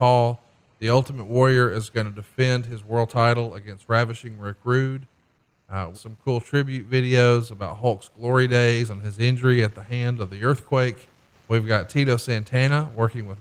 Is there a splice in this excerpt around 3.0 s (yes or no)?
no